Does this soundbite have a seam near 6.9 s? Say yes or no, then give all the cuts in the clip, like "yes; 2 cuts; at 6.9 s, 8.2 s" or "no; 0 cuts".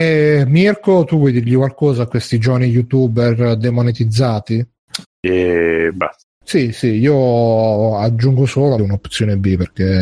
no; 2 cuts; at 5.0 s, 8.8 s